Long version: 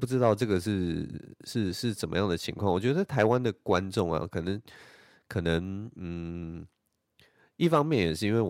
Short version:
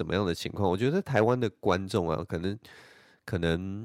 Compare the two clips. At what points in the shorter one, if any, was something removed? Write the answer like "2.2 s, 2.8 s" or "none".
none